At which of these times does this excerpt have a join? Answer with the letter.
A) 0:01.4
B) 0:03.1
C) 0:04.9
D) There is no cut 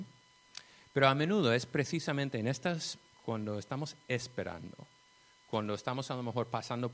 B